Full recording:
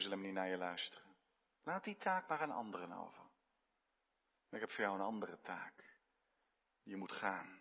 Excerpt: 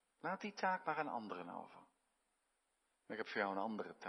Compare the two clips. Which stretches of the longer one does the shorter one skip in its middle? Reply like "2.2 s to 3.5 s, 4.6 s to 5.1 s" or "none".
none